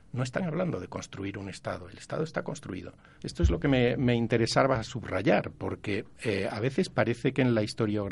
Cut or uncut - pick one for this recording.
cut